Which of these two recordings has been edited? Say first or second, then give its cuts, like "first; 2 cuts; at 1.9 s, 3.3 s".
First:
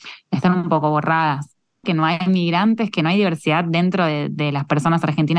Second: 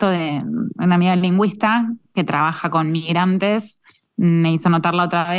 first; 1 cut; at 1.8 s